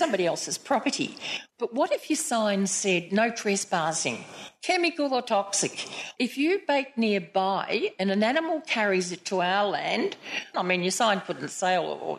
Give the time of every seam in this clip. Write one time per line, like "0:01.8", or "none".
0:01.5
0:06.2
0:10.5

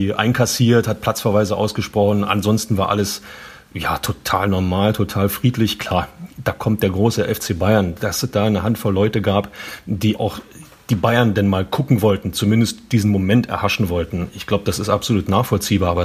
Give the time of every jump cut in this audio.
0:10.2

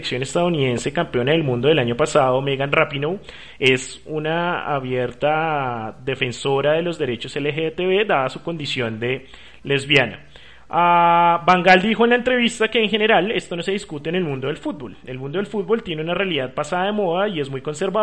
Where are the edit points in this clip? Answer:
none

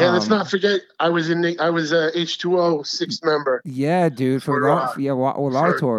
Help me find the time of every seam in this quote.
none

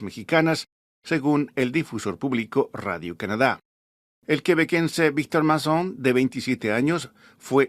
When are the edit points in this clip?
none

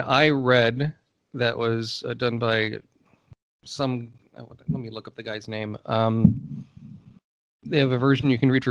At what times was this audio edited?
none

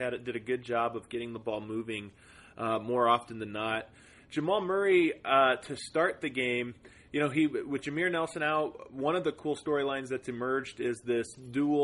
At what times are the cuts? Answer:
none

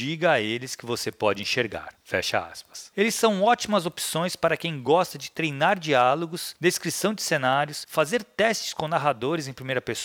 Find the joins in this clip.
0:02.9

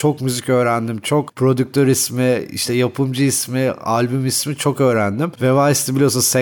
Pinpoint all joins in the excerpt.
none

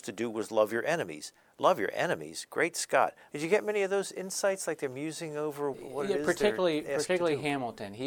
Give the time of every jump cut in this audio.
0:03.3
0:05.7

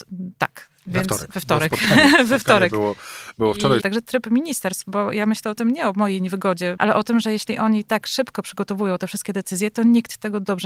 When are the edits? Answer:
0:03.8
0:06.8

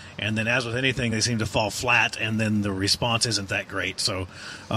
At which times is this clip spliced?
none

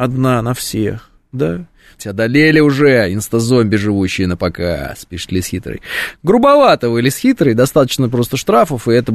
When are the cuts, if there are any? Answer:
0:02.0

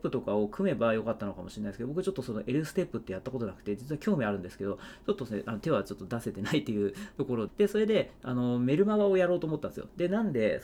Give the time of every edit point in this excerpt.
0:07.5

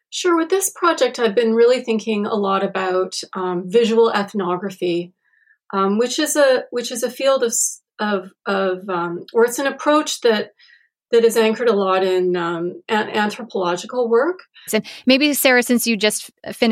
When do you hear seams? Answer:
0:14.7

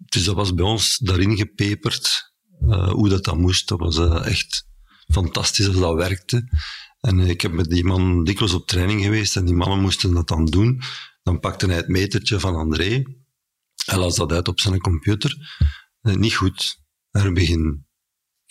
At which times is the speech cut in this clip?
none

